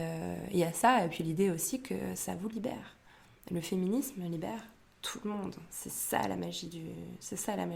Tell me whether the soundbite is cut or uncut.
uncut